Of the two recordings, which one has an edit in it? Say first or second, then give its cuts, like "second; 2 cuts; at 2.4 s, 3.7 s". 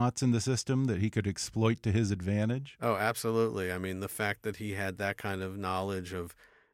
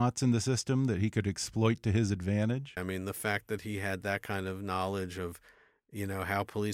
second; 1 cut; at 2.8 s